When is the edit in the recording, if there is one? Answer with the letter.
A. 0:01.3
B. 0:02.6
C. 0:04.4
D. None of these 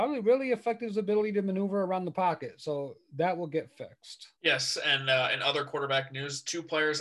C